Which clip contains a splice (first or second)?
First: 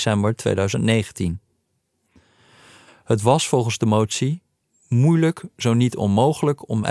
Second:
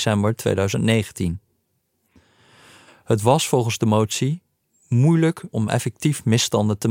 second